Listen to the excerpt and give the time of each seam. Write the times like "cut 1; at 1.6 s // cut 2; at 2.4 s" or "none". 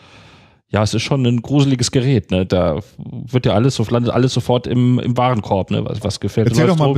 cut 1; at 2.5 s